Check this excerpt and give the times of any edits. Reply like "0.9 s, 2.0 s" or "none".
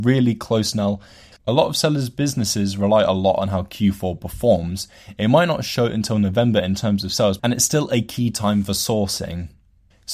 1.3 s, 7.4 s